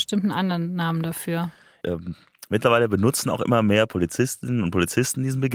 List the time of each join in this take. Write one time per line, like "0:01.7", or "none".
0:01.8